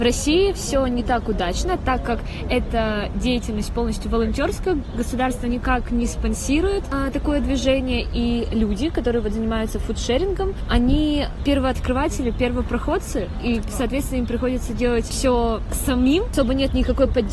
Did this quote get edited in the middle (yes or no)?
no